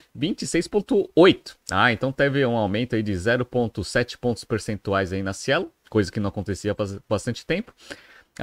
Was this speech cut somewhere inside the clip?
no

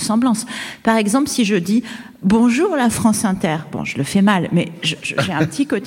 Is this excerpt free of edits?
yes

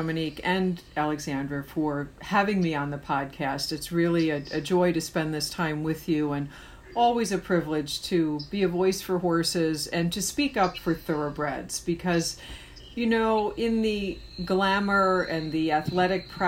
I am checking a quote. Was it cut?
no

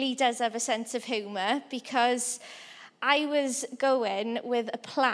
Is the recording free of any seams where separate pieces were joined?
yes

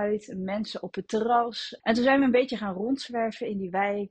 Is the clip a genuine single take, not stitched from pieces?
no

